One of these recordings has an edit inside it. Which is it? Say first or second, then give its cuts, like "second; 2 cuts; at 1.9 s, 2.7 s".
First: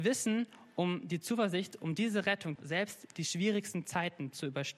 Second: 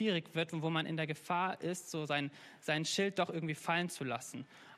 first; 1 cut; at 2.6 s